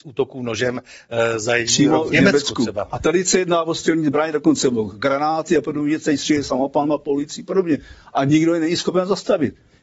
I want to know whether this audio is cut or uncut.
uncut